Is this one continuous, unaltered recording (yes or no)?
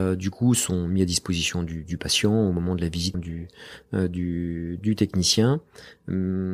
no